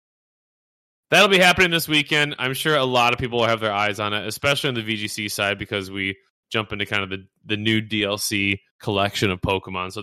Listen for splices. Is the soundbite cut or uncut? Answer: cut